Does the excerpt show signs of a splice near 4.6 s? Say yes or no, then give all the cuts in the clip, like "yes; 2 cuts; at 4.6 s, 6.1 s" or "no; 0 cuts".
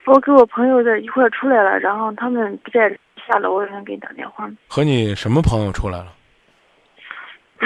yes; 1 cut; at 4.6 s